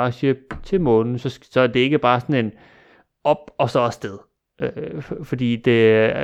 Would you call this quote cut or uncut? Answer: uncut